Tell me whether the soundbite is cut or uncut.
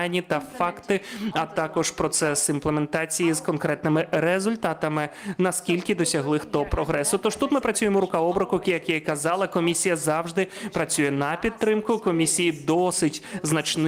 uncut